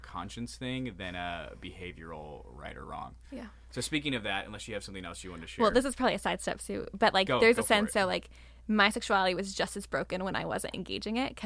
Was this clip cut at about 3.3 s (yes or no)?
no